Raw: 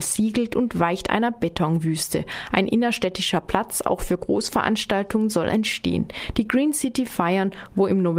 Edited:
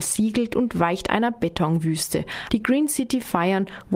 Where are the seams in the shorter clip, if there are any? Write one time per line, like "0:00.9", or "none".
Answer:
0:02.5